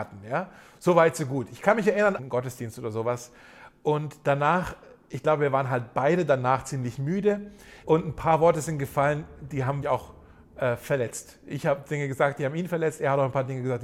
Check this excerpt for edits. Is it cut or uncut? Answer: cut